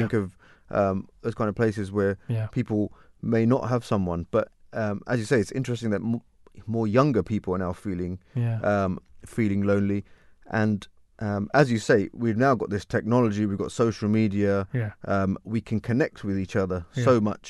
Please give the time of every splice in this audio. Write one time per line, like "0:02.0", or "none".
none